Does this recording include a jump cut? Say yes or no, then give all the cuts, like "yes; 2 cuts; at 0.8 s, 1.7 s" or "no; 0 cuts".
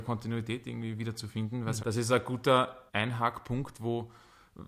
yes; 2 cuts; at 1.8 s, 2.9 s